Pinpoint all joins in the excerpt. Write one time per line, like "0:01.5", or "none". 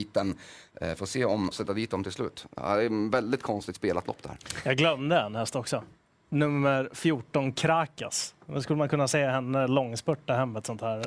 0:01.5

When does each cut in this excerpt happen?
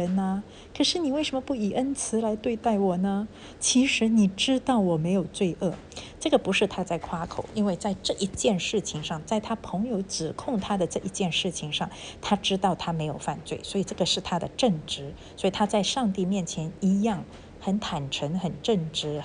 none

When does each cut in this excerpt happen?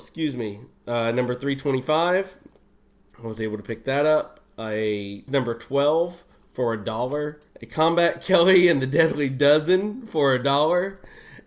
0:05.3
0:07.5

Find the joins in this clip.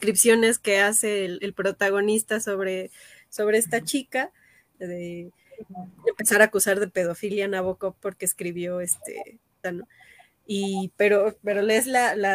0:04.7
0:09.6

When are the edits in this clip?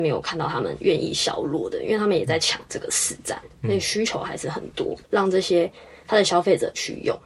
0:05.0

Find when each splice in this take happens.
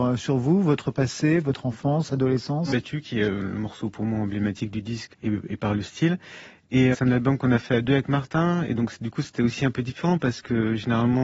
0:02.7
0:05.1
0:06.9

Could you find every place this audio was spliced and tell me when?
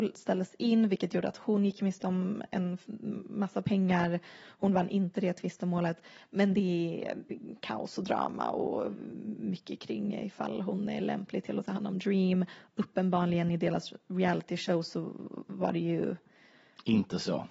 none

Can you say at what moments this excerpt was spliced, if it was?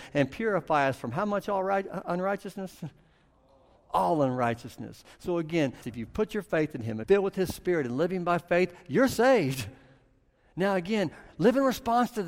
0:05.8
0:07.0

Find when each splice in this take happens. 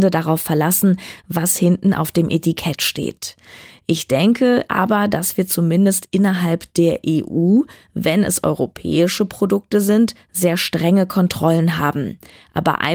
none

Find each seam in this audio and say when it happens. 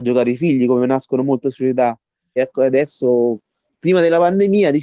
0:02.4

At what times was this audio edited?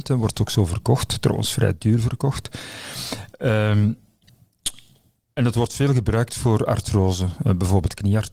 none

